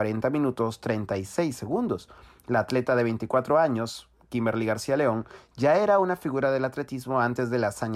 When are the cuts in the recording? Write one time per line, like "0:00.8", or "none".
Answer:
none

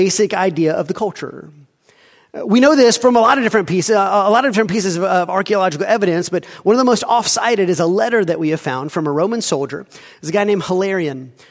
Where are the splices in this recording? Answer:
none

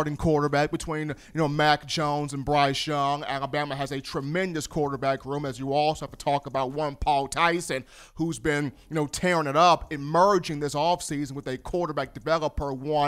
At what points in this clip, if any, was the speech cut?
none

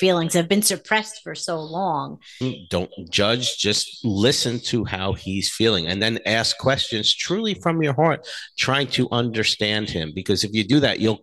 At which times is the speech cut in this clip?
0:02.4

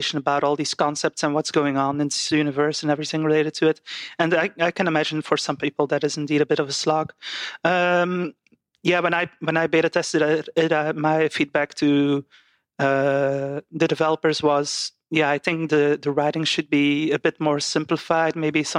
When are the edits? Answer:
none

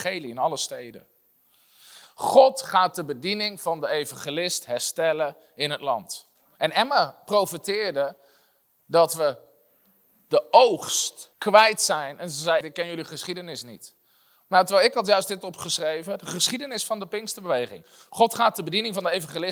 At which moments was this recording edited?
0:06.6
0:11.3
0:12.6

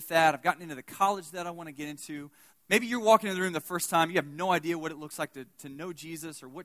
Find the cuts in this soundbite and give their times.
0:02.5

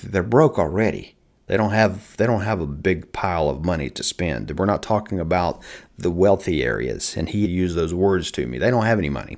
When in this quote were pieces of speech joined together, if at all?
0:07.4

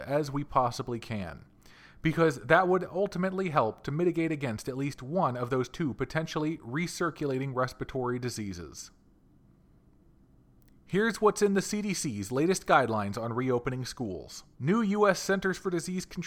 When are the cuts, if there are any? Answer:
0:14.5

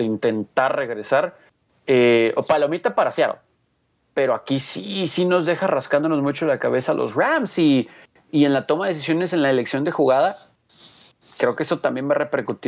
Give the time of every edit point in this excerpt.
none

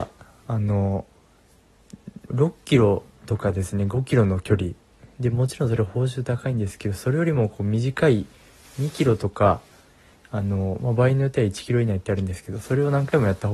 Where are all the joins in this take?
0:02.3

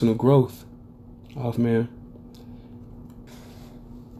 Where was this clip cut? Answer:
0:01.5
0:03.3

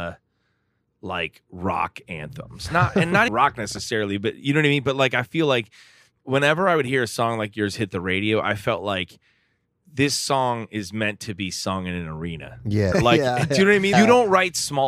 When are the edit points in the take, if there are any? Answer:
0:03.3
0:12.9
0:13.9

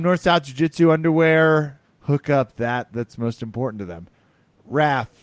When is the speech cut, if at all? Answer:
0:01.8

